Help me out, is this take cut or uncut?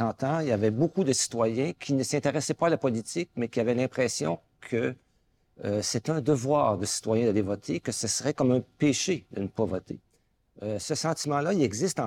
uncut